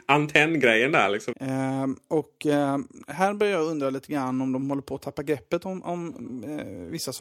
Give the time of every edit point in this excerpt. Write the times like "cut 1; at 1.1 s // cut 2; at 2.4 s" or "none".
cut 1; at 1.3 s